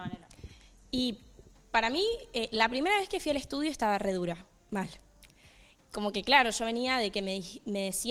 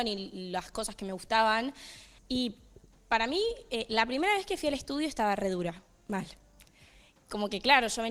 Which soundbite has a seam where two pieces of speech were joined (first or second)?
second